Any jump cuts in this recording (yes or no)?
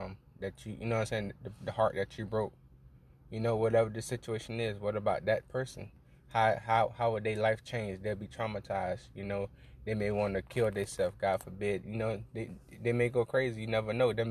no